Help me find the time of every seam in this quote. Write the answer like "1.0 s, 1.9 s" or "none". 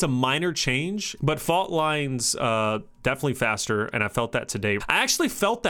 1.2 s, 4.8 s